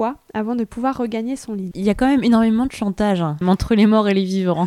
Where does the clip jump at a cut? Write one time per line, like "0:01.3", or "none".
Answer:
0:01.7
0:03.4